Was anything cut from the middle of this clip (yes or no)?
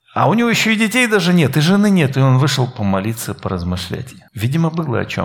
yes